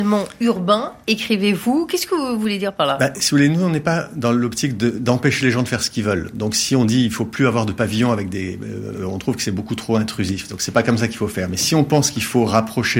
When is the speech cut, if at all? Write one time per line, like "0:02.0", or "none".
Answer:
0:08.9